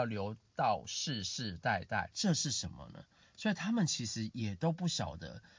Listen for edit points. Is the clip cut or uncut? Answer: cut